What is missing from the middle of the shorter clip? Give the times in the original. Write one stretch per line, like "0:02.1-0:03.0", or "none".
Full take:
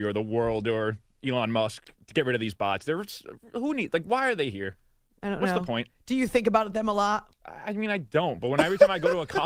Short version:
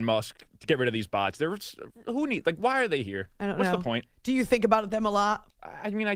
0:04.8-0:05.2